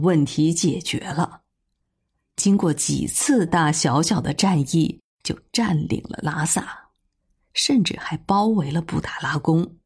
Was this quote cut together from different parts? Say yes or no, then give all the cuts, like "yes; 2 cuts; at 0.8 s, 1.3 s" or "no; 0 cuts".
yes; 1 cut; at 3.5 s